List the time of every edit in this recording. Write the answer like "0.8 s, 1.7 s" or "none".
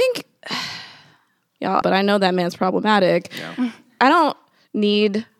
1.8 s

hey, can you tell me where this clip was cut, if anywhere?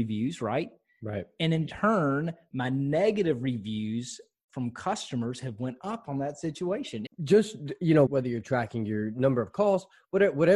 7.1 s, 8.1 s

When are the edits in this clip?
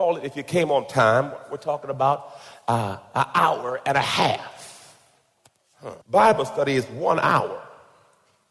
6.0 s

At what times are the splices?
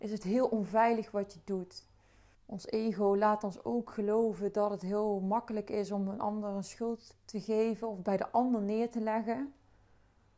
2.3 s

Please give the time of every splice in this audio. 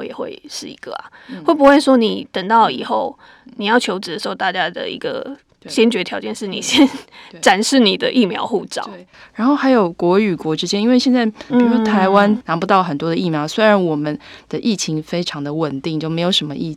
11.5 s

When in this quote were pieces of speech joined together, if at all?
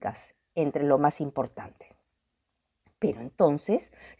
none

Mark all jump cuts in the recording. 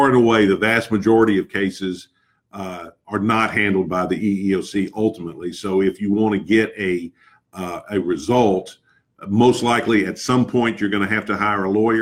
none

